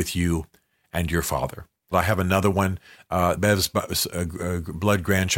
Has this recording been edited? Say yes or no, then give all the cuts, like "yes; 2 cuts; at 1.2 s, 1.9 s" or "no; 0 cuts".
yes; 2 cuts; at 1.9 s, 3.4 s